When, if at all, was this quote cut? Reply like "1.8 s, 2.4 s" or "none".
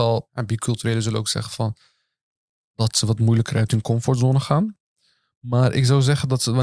none